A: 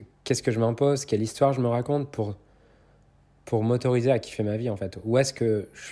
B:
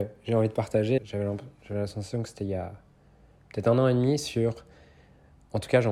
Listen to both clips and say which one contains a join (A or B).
B